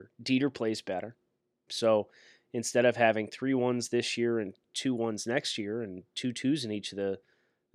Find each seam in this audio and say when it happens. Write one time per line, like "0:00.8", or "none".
0:01.7